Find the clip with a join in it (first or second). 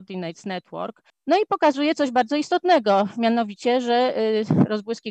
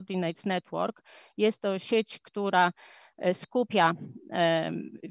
first